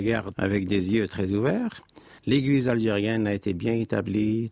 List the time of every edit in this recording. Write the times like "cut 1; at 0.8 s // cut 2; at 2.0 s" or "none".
cut 1; at 2.2 s